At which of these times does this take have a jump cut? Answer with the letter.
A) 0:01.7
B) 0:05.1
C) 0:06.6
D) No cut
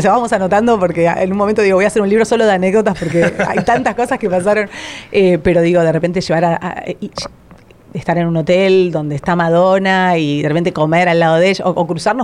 D